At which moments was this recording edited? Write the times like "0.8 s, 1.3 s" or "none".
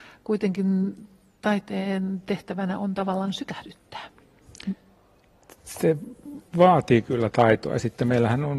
none